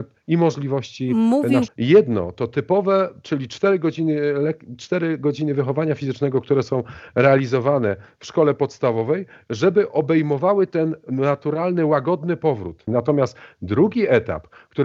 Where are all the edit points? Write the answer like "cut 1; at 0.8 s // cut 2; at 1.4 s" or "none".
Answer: cut 1; at 1.7 s // cut 2; at 12.9 s